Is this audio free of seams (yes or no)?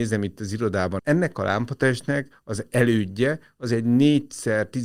no